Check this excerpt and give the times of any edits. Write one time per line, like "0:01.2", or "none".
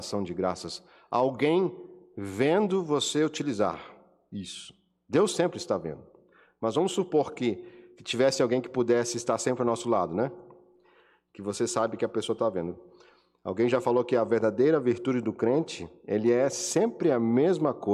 none